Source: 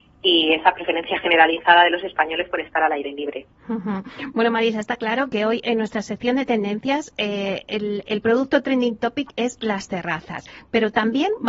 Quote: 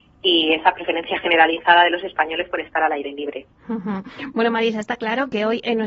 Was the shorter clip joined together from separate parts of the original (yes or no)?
no